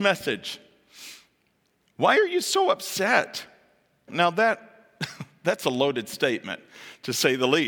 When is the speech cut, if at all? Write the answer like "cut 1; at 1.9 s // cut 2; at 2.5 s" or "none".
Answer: cut 1; at 4.1 s